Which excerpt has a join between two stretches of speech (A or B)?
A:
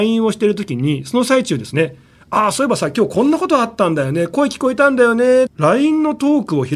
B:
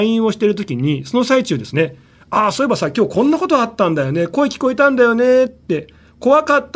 A